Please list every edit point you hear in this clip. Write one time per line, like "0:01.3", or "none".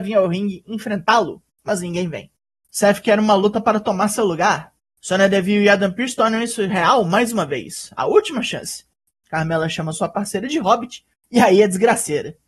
0:02.6
0:09.1

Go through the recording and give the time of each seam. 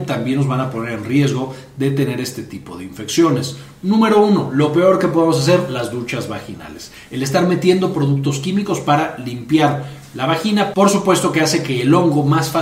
none

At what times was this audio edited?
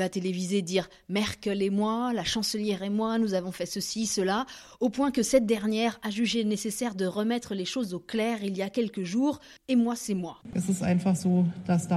0:09.6

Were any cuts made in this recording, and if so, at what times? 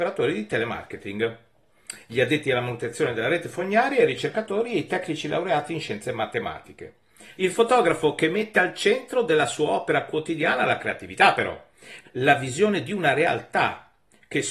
0:07.4
0:12.0

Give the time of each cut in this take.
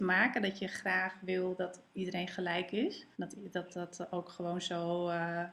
0:03.1

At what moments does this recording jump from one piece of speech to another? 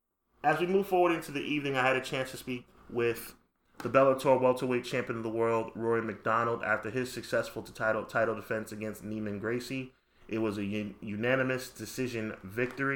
none

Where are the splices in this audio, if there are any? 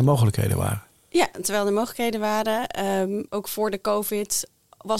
0:03.3

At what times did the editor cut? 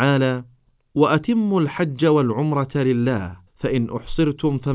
0:03.5

